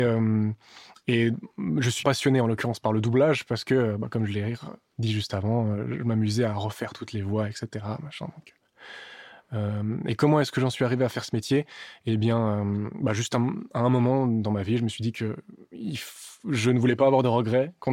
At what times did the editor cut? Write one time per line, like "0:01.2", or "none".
0:02.0